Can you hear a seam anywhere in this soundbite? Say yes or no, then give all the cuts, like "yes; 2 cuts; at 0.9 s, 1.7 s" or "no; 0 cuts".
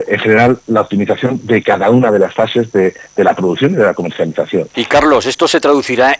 yes; 1 cut; at 4.7 s